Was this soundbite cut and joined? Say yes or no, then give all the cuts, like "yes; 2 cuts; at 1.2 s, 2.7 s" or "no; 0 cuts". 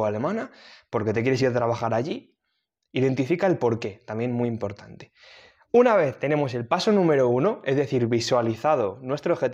no; 0 cuts